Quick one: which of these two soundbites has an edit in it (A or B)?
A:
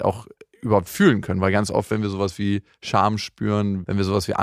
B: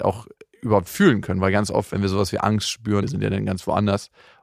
B